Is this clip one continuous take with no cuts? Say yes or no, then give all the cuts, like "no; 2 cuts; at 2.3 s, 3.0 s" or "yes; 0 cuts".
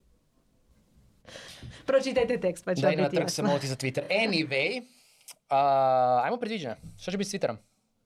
yes; 0 cuts